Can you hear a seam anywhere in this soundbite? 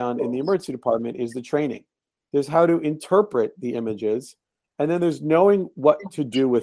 yes; 1 cut; at 2.2 s

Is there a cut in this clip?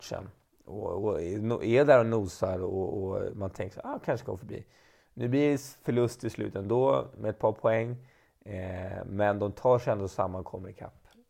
no; 0 cuts

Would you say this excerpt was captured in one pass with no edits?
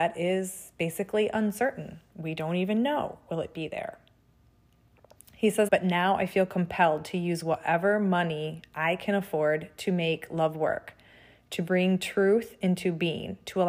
no; 1 cut; at 5.7 s

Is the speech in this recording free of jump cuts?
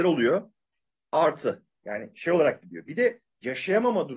no; 1 cut; at 1.8 s

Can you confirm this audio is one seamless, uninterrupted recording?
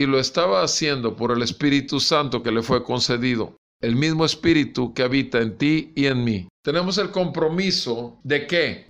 yes; 0 cuts

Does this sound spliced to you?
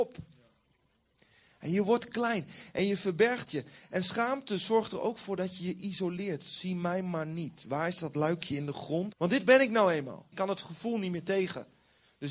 yes; 2 cuts; at 9.1 s, 10.3 s

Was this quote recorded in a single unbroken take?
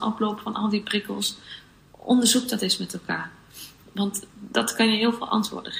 yes; 0 cuts

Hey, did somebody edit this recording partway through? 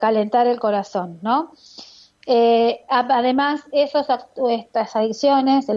no; 0 cuts

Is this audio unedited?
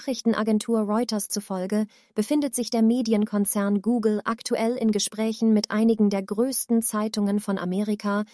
yes; 0 cuts

